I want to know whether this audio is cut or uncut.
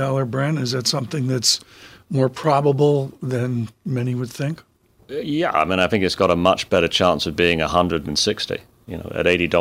uncut